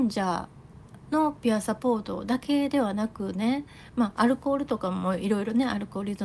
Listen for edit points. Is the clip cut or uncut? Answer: uncut